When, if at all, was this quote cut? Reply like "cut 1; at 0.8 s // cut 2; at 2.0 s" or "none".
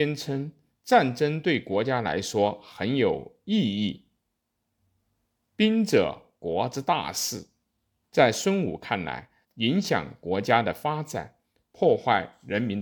cut 1; at 8.0 s // cut 2; at 9.4 s